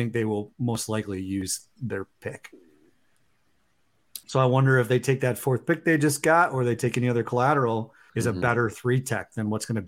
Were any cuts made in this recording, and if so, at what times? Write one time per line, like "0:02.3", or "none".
0:04.2
0:08.1